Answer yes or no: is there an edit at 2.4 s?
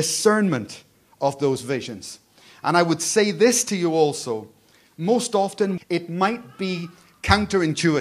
no